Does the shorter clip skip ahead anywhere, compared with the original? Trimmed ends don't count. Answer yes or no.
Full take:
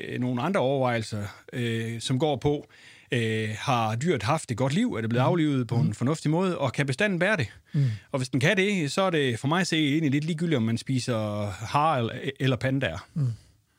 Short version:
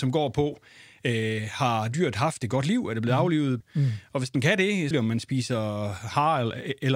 yes